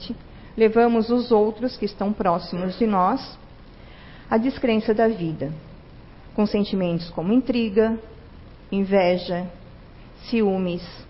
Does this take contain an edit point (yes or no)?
no